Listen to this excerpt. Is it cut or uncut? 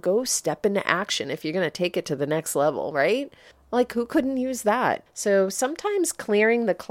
cut